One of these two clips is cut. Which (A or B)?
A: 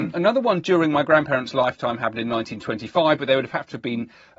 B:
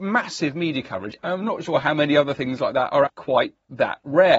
B